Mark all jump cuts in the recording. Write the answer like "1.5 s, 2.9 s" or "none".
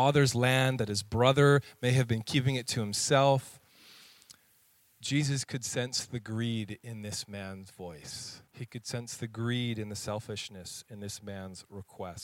8.5 s